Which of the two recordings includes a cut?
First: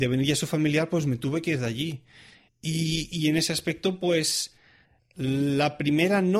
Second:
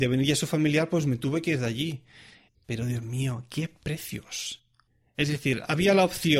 second; 1 cut; at 2.5 s

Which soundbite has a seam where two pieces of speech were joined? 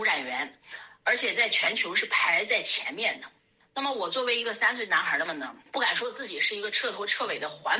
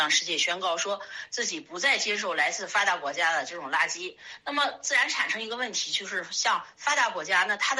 first; 1 cut; at 5.3 s

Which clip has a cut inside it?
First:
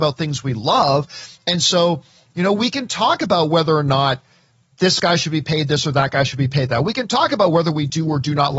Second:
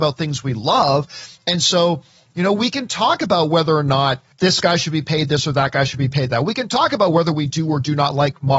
second; 1 cut; at 4.3 s

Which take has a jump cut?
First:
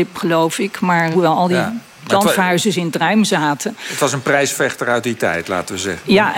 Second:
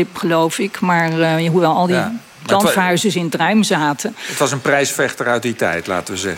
first; 1 cut; at 1.1 s

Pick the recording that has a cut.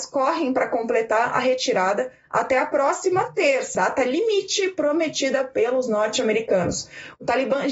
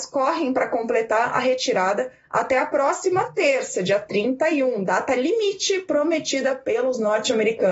first; 1 cut; at 3.7 s

